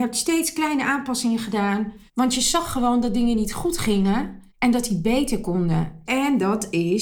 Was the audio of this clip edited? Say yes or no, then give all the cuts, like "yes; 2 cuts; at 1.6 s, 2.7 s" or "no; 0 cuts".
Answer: yes; 3 cuts; at 2.1 s, 4.5 s, 6.1 s